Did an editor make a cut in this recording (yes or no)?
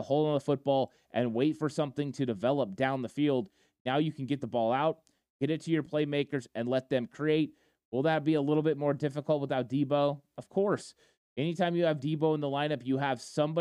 no